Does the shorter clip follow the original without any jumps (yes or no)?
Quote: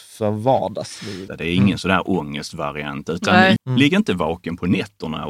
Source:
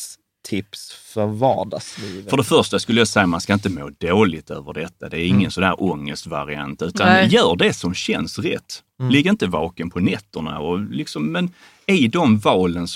no